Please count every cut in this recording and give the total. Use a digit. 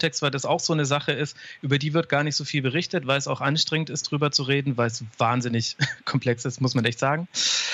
0